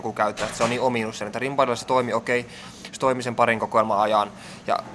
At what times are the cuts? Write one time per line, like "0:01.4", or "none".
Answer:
none